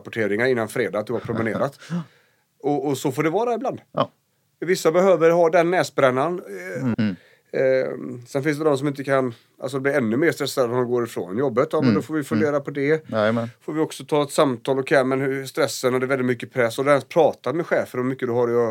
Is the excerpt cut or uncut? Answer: cut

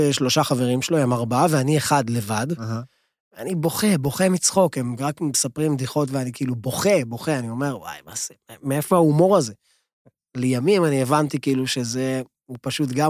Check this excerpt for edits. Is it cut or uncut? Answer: uncut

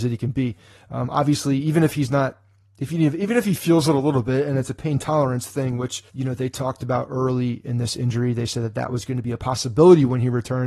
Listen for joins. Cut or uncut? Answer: cut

